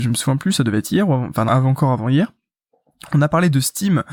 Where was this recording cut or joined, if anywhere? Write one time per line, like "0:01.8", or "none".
0:01.5